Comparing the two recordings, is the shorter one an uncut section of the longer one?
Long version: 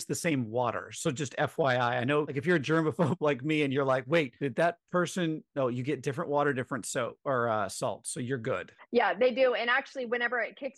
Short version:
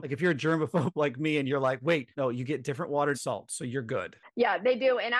no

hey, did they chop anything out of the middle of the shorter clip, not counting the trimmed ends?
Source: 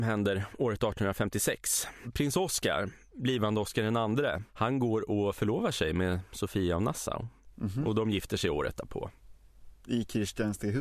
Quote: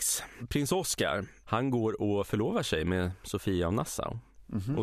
yes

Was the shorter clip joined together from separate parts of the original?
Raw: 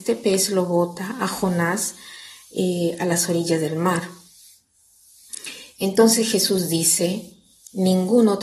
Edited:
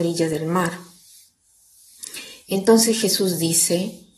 no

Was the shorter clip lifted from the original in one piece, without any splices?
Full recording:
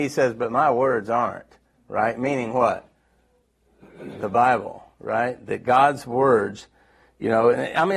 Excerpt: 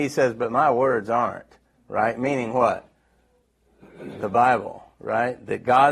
yes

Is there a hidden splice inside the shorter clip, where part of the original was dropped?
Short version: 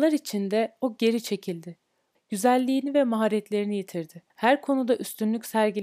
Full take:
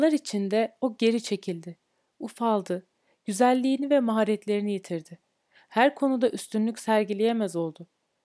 yes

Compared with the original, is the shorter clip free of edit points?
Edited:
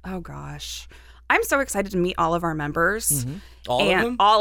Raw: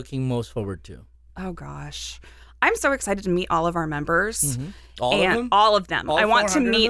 yes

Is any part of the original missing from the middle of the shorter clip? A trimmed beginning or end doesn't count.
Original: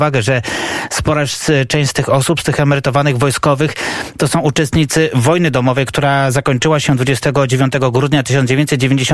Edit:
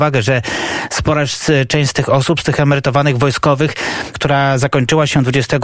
yes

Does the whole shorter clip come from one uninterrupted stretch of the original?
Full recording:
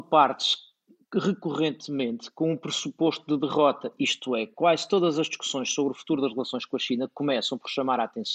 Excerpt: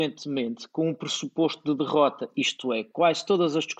yes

